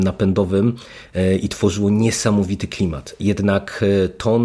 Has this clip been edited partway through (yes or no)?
yes